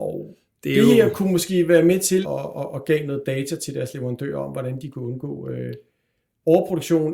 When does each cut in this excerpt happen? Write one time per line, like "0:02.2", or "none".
0:02.2

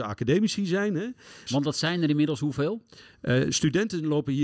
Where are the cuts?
0:01.5

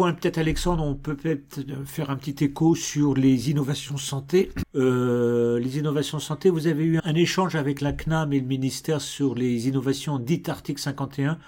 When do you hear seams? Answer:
0:04.6
0:07.0

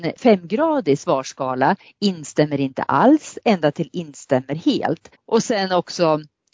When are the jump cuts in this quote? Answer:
0:05.1

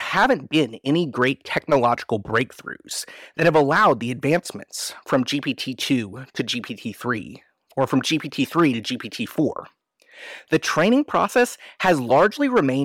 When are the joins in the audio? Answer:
none

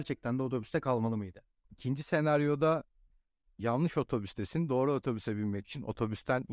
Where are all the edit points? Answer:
0:01.6

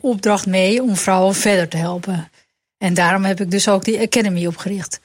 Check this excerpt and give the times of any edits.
none

